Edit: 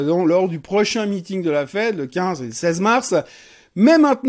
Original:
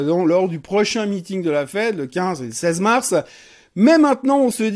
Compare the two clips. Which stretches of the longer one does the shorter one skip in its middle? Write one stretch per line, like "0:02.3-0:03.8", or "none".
none

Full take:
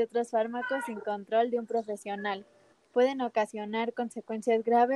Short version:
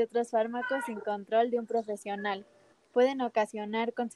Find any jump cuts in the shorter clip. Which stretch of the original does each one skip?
none

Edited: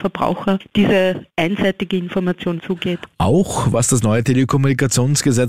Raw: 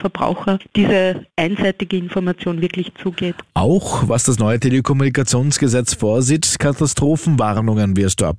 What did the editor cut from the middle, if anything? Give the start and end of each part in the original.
0:02.6-0:02.9

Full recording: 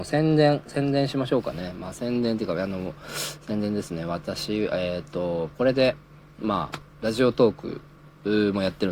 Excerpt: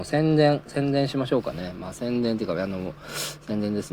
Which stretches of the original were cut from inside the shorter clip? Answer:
none

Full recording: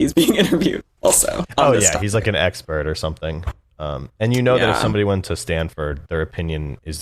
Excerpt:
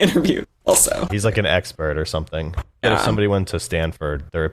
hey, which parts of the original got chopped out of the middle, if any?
0:01.5-0:02.0
0:03.7-0:04.6

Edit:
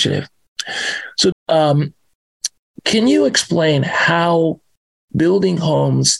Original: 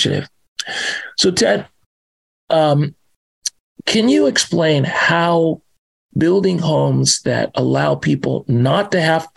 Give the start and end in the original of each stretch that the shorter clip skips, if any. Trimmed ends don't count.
0:01.3-0:02.3

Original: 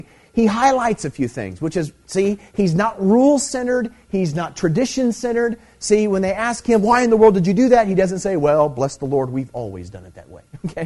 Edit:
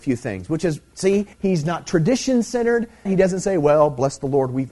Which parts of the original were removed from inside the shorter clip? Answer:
0:02.4-0:04.0
0:05.7-0:07.8

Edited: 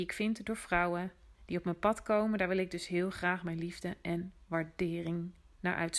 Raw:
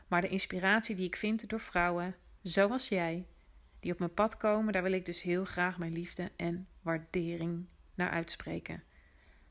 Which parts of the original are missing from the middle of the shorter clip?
0:02.4-0:03.7

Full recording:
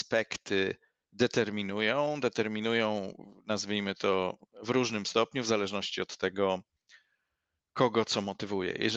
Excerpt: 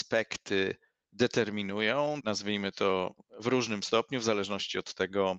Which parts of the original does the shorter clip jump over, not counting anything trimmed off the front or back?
0:02.2-0:03.4

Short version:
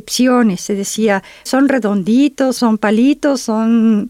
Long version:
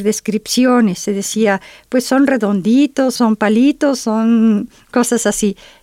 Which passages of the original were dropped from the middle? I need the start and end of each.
0:01.8-0:02.0

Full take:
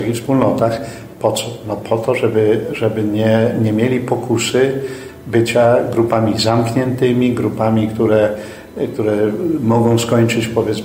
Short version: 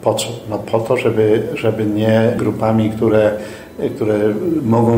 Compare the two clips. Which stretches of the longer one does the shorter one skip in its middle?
0:03.6-0:07.4

